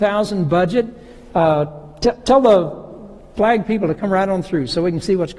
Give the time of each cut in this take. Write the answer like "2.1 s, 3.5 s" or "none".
none

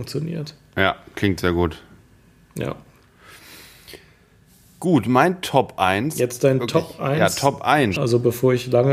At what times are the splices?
8.0 s

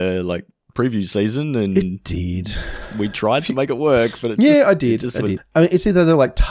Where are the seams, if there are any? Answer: 5.4 s

